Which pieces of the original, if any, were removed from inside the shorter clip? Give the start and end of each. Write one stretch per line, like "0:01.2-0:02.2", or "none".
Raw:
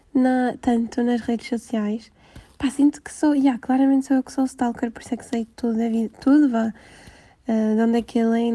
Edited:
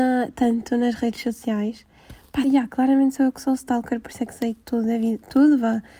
0:02.7-0:03.3